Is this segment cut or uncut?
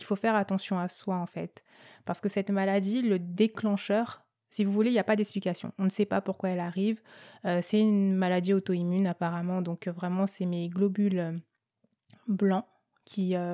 uncut